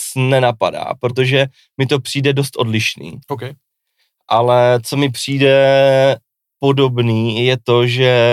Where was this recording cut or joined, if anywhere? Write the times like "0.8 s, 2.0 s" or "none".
none